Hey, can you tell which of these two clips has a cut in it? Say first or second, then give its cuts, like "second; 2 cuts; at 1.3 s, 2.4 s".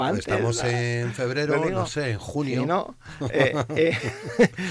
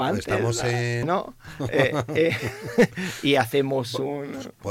second; 1 cut; at 1.0 s